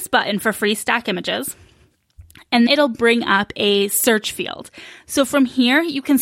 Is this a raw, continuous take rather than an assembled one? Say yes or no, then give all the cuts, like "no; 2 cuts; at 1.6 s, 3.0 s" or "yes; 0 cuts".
no; 1 cut; at 2.7 s